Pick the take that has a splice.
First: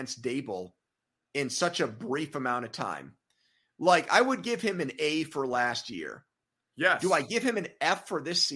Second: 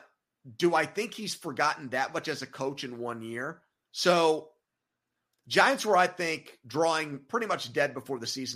second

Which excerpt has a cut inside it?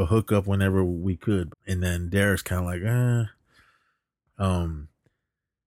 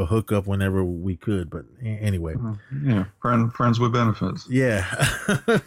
first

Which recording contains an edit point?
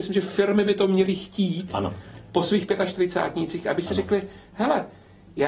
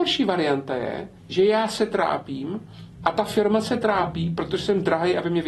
second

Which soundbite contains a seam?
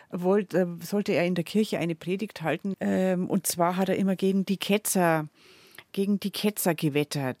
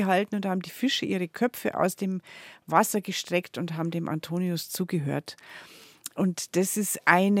first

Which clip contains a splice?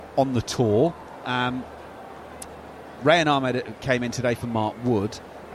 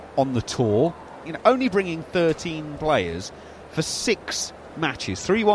second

